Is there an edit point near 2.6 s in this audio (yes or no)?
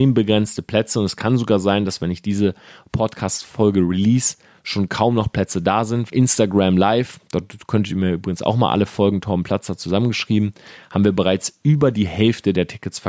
no